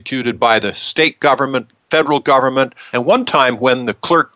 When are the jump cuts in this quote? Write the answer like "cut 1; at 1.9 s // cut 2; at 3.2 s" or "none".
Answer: cut 1; at 2.9 s